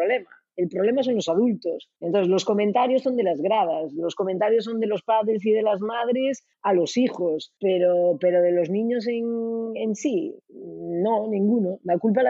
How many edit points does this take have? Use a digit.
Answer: 0